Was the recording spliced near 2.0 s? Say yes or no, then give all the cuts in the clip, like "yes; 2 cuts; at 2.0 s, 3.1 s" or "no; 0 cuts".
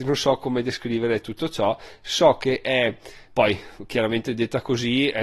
no; 1 cut; at 3.3 s